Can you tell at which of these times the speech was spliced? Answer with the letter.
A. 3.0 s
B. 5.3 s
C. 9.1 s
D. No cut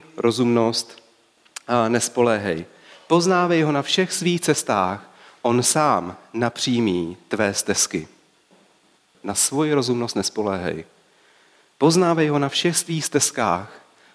C